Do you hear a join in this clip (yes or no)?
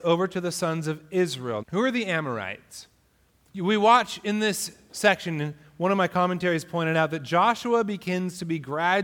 yes